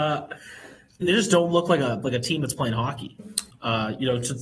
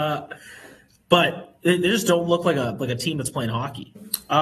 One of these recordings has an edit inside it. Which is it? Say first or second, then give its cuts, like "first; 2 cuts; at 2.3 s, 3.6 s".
first; 2 cuts; at 1.0 s, 3.5 s